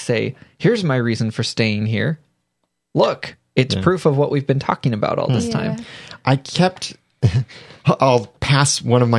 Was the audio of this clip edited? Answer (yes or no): no